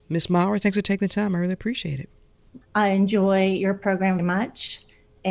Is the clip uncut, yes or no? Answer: no